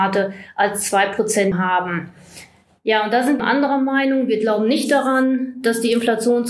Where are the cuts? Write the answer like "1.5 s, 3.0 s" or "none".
1.5 s, 3.4 s